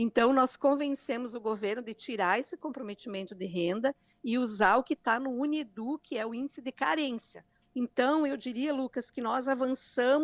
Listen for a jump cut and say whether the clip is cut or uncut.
cut